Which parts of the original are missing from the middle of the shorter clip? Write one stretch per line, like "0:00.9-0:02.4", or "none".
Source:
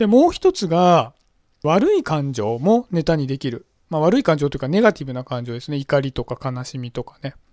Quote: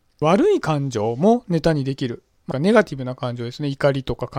0:03.9-0:04.6